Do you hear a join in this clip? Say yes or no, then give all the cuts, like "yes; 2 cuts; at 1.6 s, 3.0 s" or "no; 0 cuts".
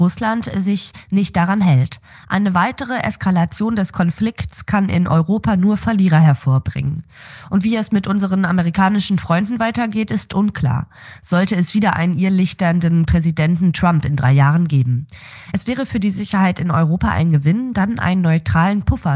no; 0 cuts